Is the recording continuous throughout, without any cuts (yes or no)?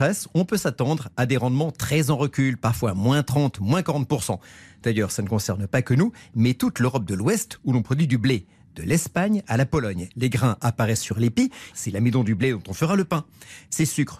no